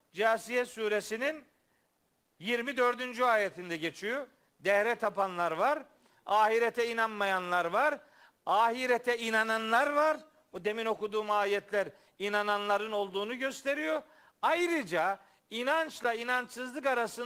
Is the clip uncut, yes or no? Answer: yes